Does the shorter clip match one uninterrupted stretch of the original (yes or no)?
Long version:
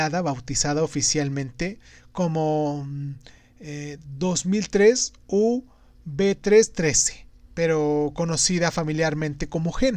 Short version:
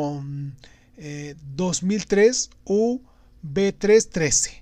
yes